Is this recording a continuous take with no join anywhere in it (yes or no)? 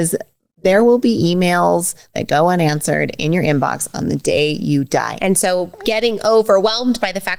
no